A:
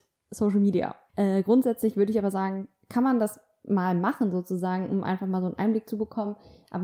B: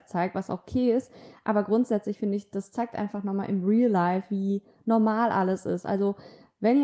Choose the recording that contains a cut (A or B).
A